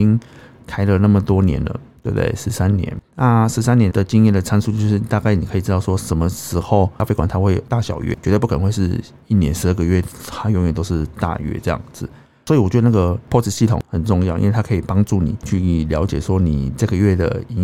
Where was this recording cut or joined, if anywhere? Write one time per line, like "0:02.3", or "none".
0:03.9